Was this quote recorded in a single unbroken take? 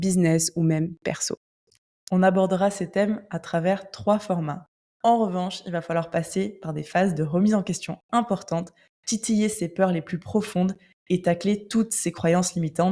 no; 2 cuts; at 4.9 s, 8.9 s

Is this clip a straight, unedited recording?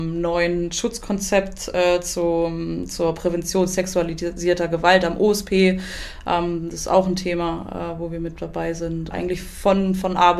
no; 1 cut; at 9.1 s

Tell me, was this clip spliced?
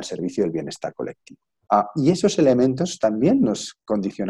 yes; 1 cut; at 1.7 s

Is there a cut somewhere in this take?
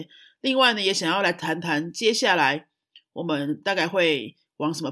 no; 0 cuts

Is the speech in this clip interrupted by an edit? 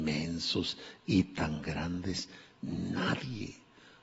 no; 0 cuts

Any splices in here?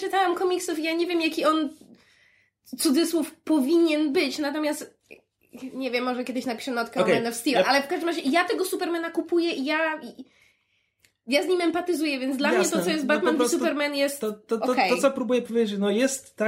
no; 0 cuts

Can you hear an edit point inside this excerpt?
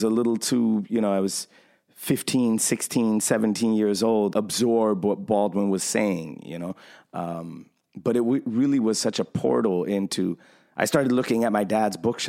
yes; 1 cut; at 4.3 s

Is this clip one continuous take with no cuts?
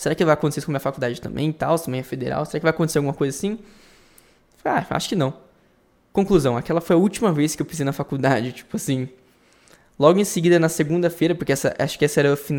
yes; 0 cuts

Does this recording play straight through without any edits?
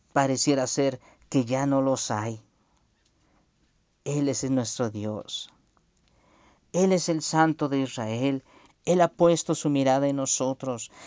no; 1 cut; at 8.7 s

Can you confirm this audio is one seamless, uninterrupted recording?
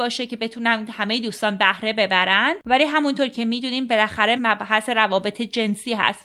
no; 1 cut; at 4.4 s

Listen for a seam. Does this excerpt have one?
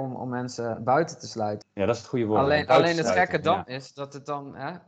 yes; 1 cut; at 1.6 s

